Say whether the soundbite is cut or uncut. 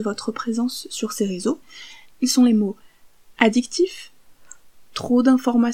cut